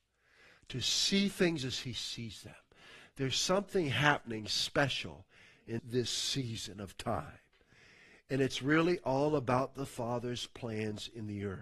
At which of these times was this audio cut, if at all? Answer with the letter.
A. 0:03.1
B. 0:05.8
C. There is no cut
B